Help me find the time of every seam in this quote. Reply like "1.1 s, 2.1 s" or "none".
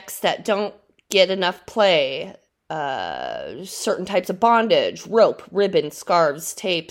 2.5 s